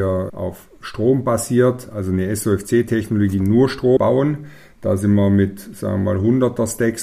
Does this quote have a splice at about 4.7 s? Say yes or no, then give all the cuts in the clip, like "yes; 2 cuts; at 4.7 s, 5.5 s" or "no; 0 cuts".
no; 0 cuts